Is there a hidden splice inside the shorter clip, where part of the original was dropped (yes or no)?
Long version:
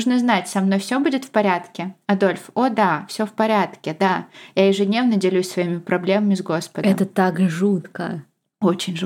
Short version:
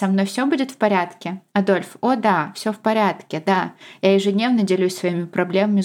no